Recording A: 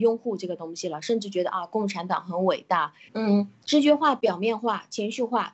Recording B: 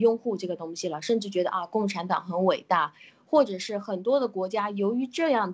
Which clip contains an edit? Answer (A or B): A